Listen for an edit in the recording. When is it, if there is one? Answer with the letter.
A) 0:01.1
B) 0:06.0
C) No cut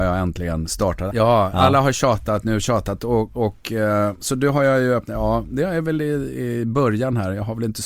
A